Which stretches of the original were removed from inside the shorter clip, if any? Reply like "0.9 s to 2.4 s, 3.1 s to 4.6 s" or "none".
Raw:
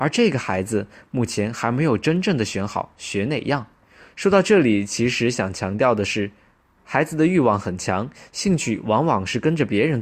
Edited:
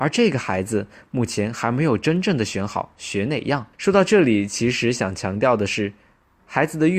3.7 s to 4.1 s